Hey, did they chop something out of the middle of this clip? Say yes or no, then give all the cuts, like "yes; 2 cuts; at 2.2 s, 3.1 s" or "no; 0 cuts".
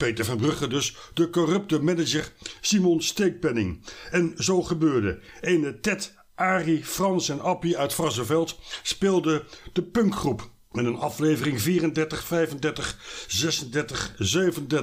no; 0 cuts